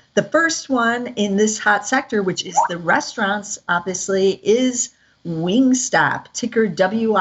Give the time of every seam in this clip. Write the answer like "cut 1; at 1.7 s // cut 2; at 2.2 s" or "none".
none